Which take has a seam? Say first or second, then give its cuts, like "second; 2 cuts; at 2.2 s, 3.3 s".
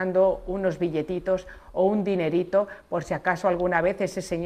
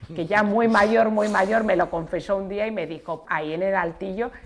second; 1 cut; at 3.2 s